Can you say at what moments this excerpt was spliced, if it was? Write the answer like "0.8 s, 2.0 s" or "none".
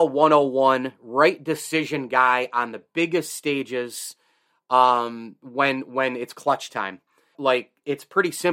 7.3 s